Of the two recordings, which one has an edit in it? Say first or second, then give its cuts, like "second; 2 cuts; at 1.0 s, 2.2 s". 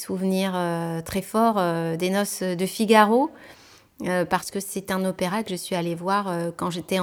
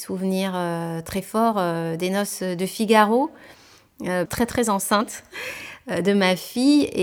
second; 1 cut; at 4.3 s